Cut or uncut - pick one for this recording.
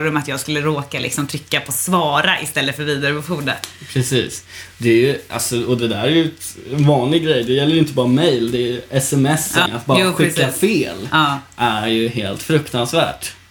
cut